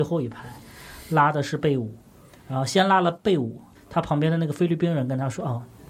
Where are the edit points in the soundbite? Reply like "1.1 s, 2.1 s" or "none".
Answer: 3.8 s

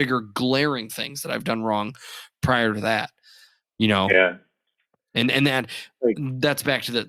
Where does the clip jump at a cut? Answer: 3.6 s

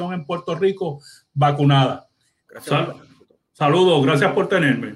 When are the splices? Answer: 2.5 s

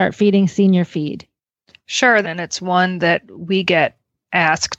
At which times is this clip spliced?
2.2 s

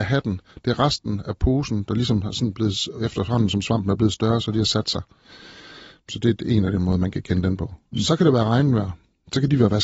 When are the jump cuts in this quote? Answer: none

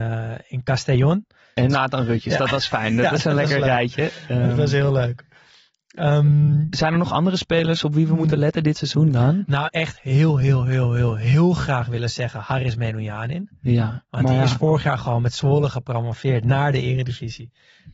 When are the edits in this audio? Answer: 1.6 s, 9.7 s

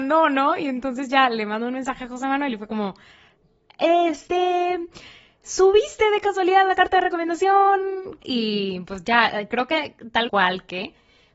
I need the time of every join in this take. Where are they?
8.2 s, 10.3 s

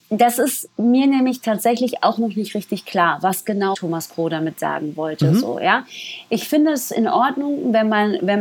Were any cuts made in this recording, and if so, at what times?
3.7 s

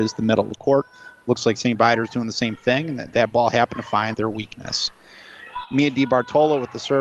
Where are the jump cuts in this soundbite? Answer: 4.1 s

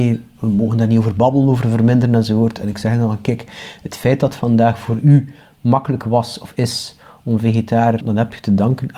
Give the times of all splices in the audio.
8.0 s

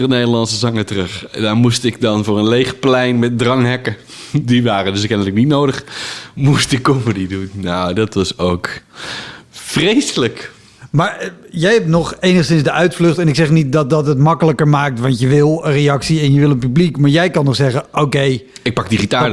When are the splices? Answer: none

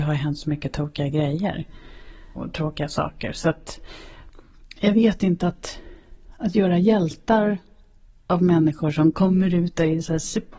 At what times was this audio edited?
none

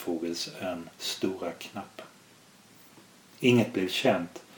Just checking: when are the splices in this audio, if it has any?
none

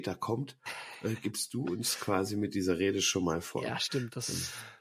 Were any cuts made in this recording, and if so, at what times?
none

